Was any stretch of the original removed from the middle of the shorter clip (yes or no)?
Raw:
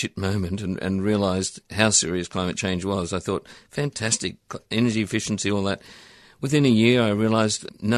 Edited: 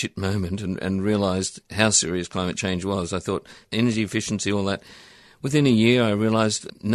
yes